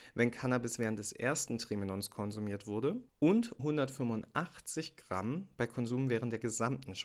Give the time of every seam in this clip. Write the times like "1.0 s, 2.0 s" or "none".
3.6 s

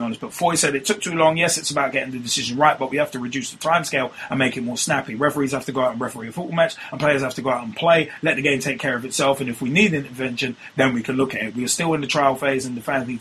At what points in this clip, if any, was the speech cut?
none

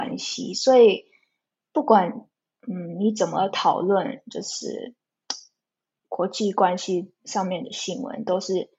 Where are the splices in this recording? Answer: none

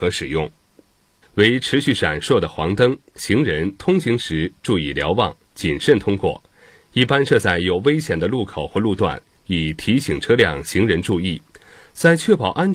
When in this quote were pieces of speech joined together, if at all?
1.2 s, 3.2 s

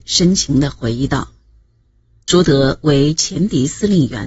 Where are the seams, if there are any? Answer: 2.2 s

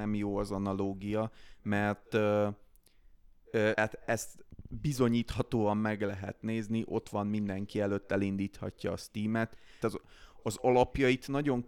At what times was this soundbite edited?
3.7 s, 9.8 s

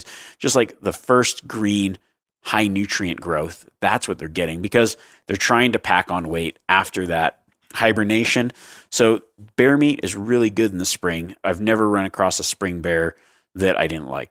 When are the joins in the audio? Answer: none

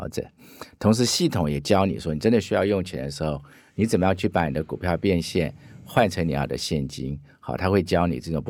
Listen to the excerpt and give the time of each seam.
none

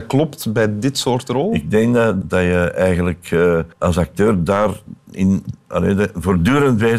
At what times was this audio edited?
2.2 s, 3.7 s

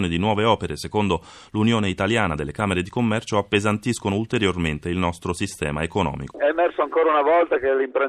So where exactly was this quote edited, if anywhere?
6.3 s

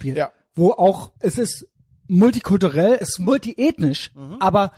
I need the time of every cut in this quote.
1.2 s, 3.0 s

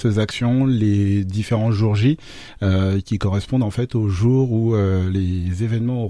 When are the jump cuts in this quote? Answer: none

